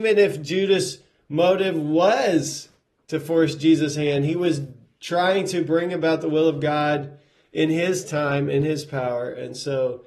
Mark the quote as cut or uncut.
uncut